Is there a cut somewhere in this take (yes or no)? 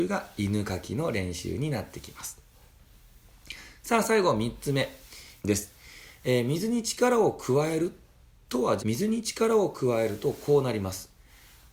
yes